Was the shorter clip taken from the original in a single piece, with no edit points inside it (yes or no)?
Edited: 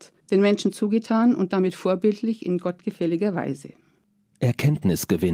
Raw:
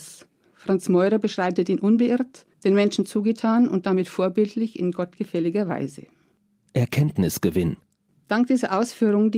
yes